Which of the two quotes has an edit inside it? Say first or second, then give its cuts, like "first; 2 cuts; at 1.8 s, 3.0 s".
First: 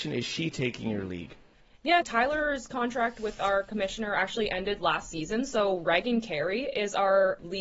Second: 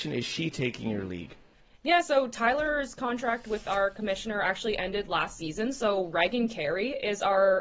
first; 1 cut; at 2.0 s